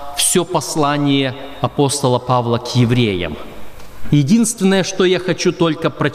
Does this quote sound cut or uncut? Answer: uncut